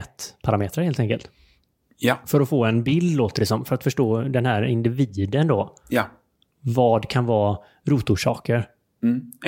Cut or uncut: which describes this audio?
uncut